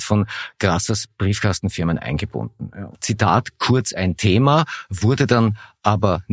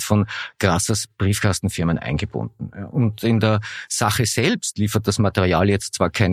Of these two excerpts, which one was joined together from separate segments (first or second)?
first